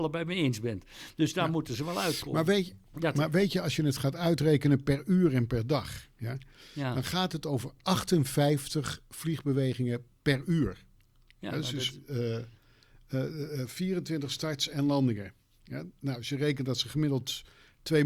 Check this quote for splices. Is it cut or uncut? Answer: cut